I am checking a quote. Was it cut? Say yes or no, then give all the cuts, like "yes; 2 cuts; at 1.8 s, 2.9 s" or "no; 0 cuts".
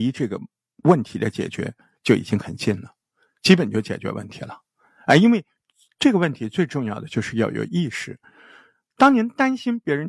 no; 0 cuts